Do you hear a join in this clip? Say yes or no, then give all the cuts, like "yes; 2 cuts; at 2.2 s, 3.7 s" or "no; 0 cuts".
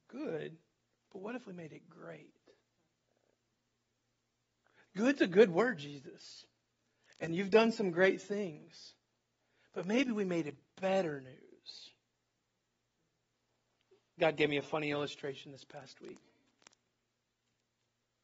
no; 0 cuts